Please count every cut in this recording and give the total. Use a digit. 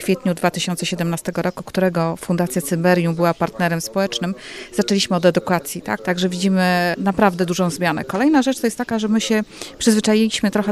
1